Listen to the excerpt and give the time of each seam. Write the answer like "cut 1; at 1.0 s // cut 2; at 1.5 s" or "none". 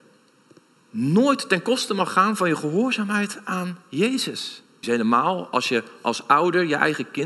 cut 1; at 4.8 s